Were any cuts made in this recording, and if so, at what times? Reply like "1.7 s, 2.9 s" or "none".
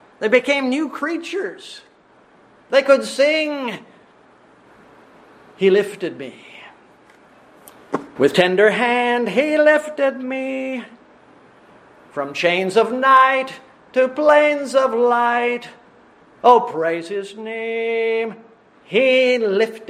8.2 s